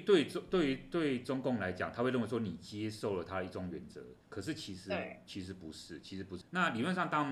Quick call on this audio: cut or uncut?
cut